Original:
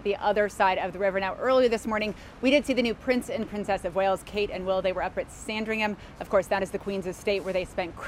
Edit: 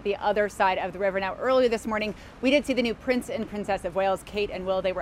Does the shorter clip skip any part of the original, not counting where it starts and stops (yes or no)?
no